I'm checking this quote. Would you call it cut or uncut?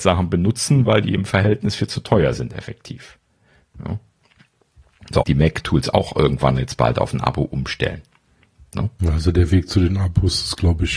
cut